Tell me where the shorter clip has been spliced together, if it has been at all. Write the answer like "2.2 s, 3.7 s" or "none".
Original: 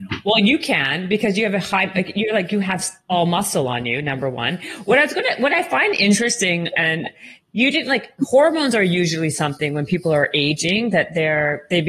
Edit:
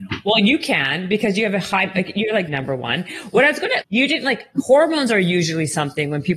2.5 s, 3.8 s